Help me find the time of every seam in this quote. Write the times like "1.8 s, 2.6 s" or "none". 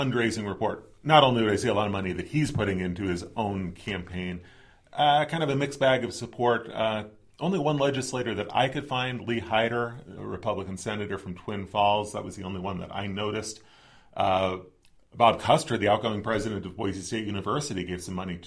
10.2 s